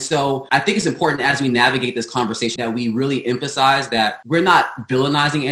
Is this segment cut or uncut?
cut